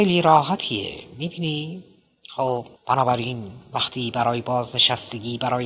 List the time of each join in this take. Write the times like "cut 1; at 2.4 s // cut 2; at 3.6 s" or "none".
cut 1; at 2.8 s